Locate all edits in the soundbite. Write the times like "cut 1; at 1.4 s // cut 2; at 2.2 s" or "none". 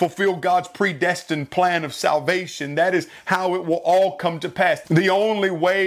cut 1; at 4.8 s